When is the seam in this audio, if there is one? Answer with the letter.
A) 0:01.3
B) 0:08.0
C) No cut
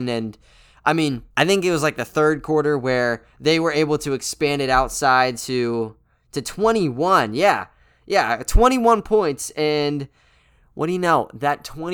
A